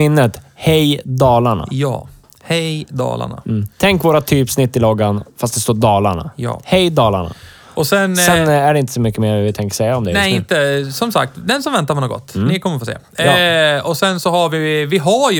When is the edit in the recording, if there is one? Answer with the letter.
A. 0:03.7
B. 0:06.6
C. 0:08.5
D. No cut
D